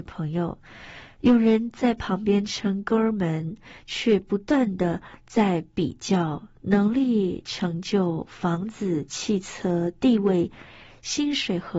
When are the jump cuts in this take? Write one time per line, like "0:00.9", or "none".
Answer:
none